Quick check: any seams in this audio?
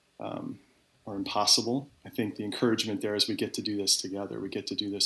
yes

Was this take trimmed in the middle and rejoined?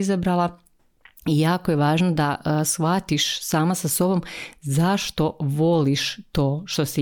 no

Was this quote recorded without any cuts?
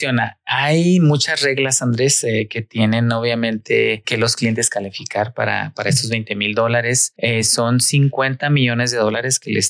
yes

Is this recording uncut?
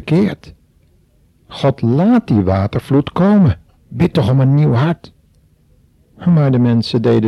no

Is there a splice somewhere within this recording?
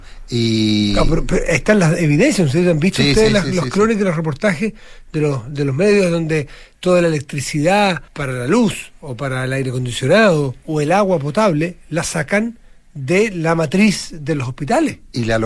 yes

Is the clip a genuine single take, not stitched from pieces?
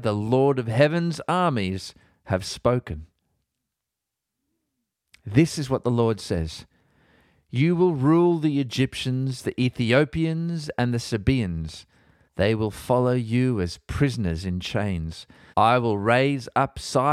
no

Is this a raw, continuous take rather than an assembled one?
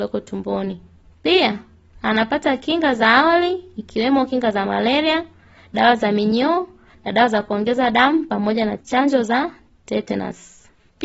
yes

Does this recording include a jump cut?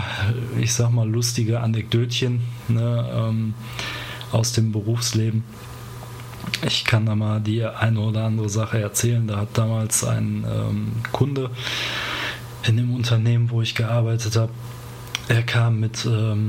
no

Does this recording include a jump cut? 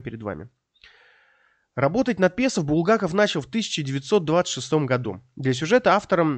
no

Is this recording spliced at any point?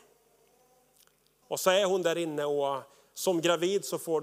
yes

